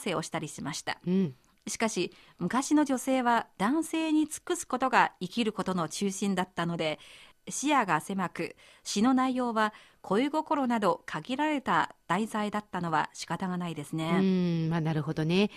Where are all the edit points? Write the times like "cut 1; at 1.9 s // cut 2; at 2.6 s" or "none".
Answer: none